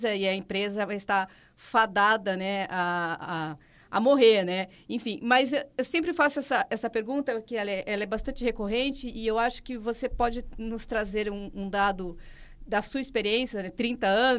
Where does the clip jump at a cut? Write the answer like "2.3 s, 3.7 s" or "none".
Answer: none